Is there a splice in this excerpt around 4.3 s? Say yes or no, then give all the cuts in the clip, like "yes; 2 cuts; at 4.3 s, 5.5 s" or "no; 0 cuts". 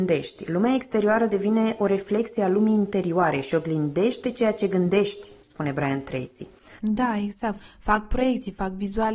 no; 1 cut; at 6.8 s